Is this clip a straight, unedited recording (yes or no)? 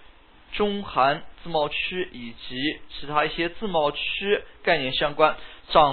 yes